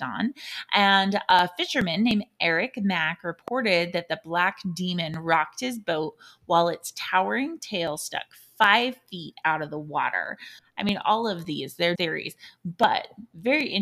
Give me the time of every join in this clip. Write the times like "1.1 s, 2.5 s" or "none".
10.6 s, 11.9 s